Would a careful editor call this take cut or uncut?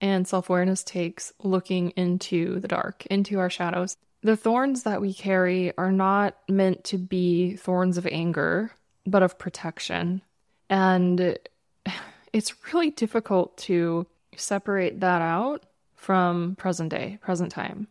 cut